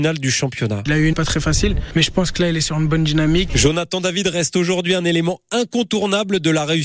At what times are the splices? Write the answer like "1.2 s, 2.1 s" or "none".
1.1 s, 3.5 s